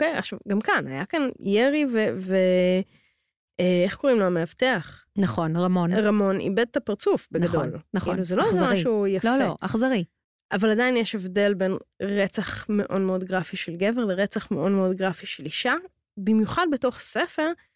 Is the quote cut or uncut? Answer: uncut